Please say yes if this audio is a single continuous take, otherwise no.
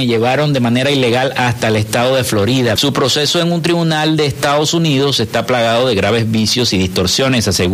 no